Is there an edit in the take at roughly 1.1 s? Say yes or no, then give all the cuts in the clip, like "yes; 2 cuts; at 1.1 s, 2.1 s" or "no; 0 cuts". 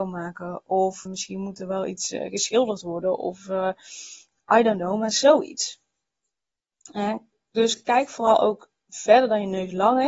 yes; 1 cut; at 1.1 s